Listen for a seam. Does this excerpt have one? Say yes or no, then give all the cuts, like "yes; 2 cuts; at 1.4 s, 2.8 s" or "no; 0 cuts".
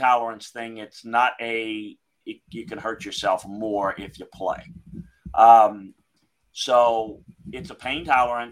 no; 0 cuts